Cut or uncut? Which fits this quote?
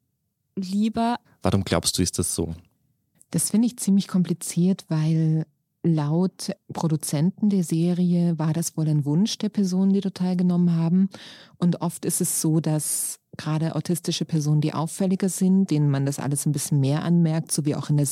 cut